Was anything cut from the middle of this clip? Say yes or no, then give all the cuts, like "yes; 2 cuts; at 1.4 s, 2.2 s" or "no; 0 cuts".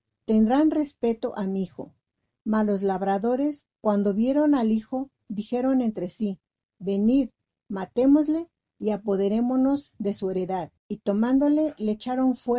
yes; 2 cuts; at 6.6 s, 10.8 s